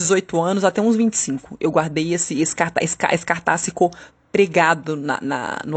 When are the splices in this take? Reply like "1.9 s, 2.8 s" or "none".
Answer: none